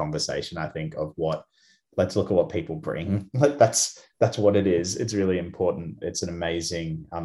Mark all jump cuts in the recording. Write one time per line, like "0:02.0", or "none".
0:06.0